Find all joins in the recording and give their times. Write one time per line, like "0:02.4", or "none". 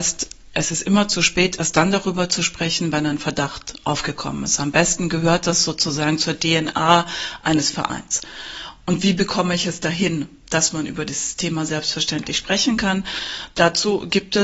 none